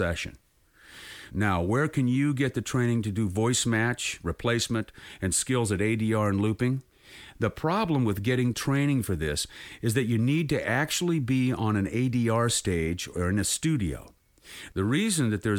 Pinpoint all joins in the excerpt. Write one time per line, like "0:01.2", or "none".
none